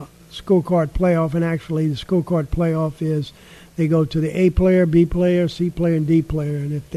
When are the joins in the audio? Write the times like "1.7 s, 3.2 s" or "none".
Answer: none